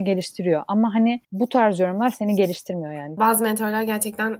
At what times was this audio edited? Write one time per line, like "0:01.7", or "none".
0:01.2
0:03.2